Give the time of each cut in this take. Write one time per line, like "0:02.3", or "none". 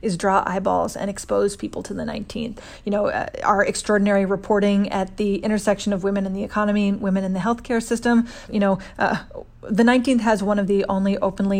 0:08.5